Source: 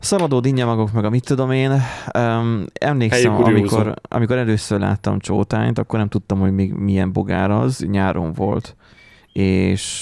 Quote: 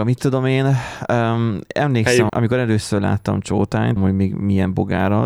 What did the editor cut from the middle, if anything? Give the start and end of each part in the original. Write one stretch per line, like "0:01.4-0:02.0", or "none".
0:03.3-0:04.1
0:05.7-0:06.3

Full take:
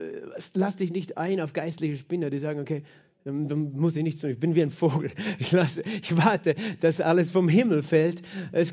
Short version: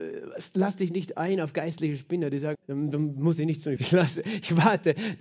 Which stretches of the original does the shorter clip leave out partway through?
0:02.5-0:03.1
0:04.3-0:05.4

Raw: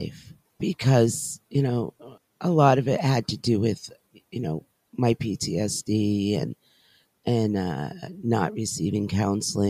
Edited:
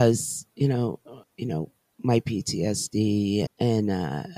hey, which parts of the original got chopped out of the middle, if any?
0:02.3-0:04.2
0:06.4-0:07.1

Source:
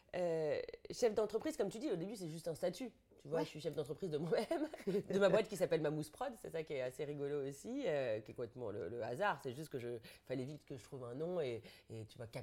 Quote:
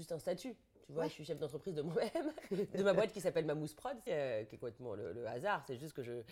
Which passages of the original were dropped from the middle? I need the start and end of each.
0:06.4-0:07.8

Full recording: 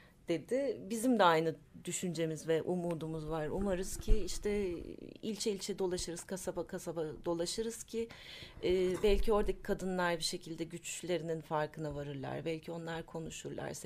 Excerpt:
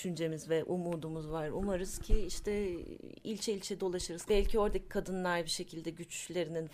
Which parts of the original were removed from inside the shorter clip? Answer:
0:06.3-0:09.0

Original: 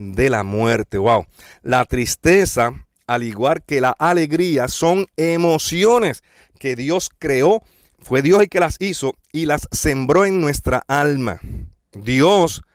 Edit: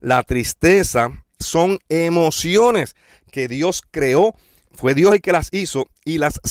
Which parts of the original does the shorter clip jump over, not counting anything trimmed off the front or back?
0:03.0-0:04.7

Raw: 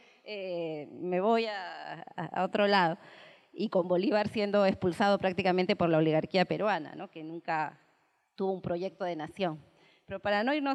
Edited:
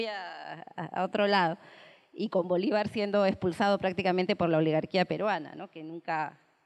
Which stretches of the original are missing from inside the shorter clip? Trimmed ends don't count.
none

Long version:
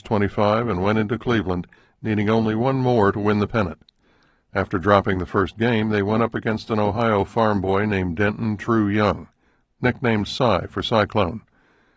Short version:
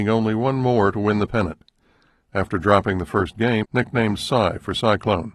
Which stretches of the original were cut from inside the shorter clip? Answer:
0:05.8-0:09.7

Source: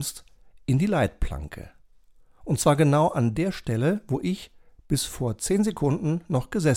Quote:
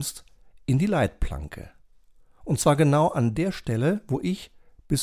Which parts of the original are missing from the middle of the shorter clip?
none

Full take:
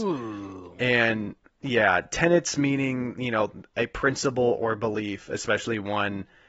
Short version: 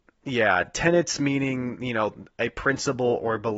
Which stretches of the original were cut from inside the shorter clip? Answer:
none

